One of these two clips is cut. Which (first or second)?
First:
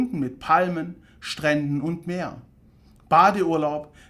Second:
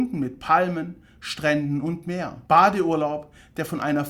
second